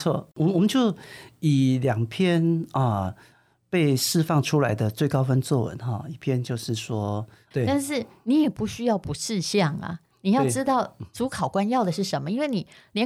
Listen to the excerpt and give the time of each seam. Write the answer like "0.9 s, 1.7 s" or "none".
7.5 s